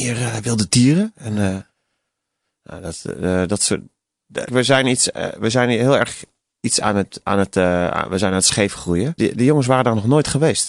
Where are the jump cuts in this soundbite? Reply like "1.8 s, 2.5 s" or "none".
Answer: 4.5 s, 7.3 s, 9.2 s